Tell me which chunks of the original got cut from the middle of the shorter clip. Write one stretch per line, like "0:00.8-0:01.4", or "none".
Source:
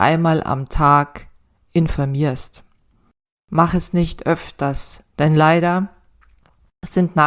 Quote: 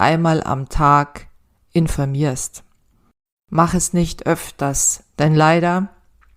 none